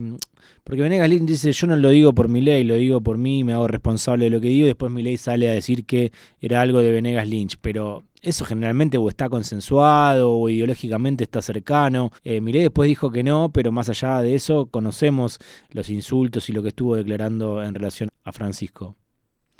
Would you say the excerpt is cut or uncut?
cut